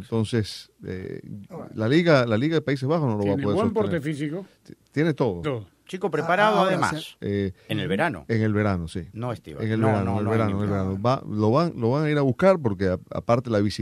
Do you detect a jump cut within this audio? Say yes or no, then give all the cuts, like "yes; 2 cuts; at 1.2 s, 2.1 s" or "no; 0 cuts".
yes; 2 cuts; at 5.4 s, 7.2 s